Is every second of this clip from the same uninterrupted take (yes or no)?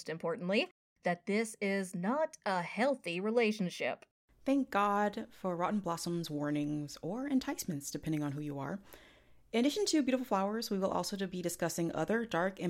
yes